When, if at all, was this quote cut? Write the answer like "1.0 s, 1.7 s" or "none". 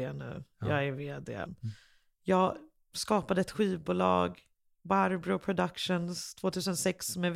1.5 s